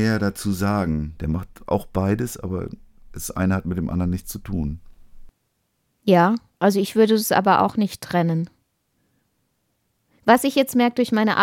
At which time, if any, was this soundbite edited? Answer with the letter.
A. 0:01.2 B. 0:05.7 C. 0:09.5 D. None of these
A